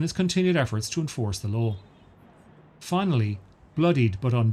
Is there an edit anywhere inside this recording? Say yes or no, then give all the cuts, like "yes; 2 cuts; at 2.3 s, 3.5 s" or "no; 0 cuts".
no; 0 cuts